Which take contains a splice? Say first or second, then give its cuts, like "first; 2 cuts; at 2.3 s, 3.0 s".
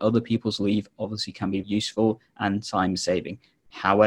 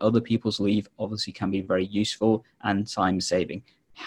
first; 1 cut; at 1.6 s